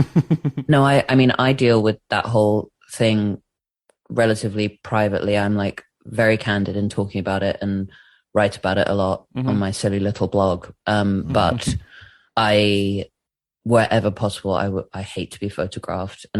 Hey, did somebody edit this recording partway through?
no; 0 cuts

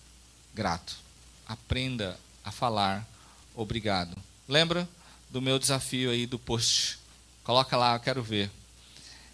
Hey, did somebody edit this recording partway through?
no; 0 cuts

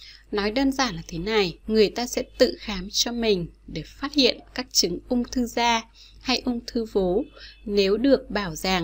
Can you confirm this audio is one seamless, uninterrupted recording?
no; 1 cut; at 1.6 s

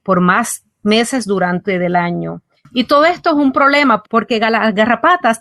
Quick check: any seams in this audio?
yes; 2 cuts; at 2.6 s, 4.0 s

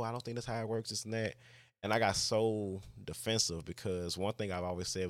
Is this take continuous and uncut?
yes; 0 cuts

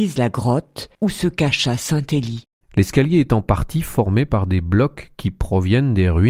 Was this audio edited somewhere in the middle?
yes; 2 cuts; at 0.9 s, 2.6 s

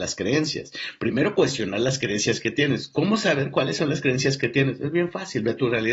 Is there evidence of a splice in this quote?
no; 0 cuts

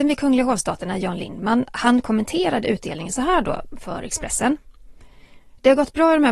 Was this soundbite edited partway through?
no; 0 cuts

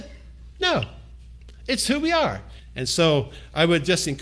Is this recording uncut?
no; 1 cut; at 2.6 s

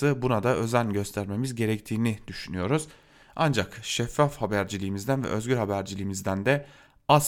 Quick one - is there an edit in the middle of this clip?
no; 0 cuts

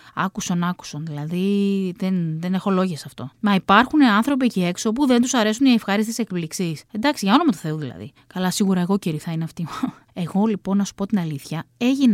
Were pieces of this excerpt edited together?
no; 0 cuts

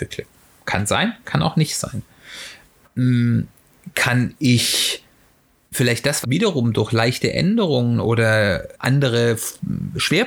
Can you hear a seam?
yes; 2 cuts; at 6.2 s, 8.7 s

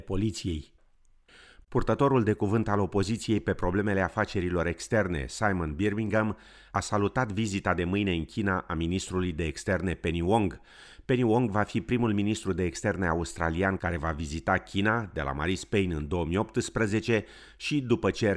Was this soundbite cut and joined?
no; 0 cuts

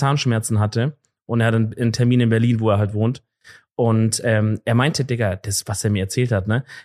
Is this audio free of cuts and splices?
yes; 0 cuts

